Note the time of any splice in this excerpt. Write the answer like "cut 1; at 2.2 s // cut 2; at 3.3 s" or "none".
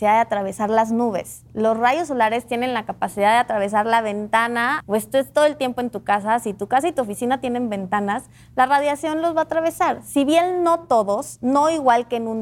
cut 1; at 4.8 s